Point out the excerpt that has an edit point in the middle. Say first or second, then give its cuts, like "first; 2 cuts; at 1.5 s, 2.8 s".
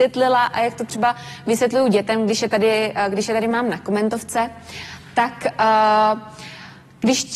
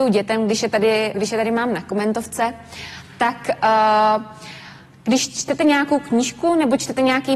second; 1 cut; at 1.1 s